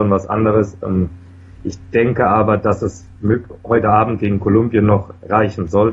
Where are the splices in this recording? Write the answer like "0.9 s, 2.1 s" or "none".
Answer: none